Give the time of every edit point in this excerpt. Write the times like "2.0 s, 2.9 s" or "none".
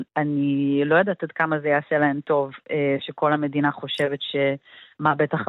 none